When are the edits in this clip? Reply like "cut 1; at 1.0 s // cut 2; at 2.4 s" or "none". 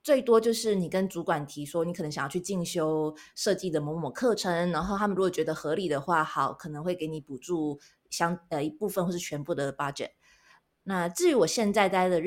none